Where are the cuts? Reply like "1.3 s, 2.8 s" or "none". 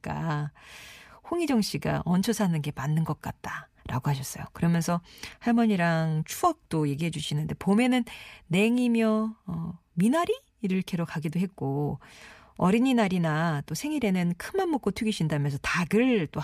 3.8 s